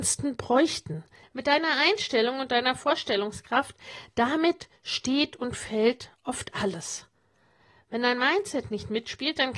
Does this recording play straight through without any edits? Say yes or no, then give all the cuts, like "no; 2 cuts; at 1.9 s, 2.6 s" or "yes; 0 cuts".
no; 1 cut; at 1.2 s